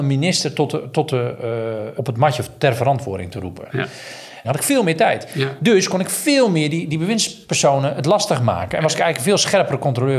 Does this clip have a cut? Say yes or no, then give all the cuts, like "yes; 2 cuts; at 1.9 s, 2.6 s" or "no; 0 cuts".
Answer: yes; 2 cuts; at 2.0 s, 4.4 s